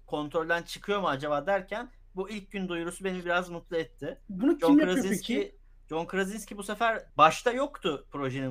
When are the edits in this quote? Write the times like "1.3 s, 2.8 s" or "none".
7.1 s